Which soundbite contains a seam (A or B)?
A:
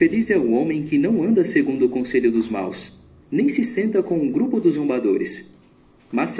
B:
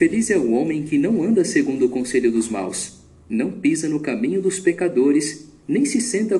A